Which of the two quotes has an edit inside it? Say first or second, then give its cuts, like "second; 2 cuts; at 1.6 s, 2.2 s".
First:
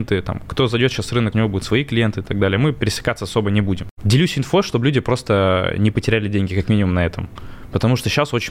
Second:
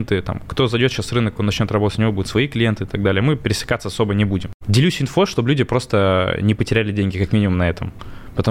first; 1 cut; at 1.3 s